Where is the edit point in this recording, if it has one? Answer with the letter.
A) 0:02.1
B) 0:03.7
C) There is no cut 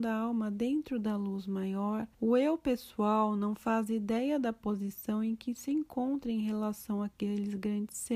A